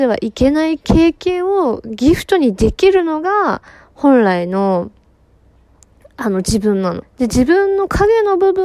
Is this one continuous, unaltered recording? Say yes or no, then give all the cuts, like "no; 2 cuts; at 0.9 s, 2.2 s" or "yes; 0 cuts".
no; 1 cut; at 7.0 s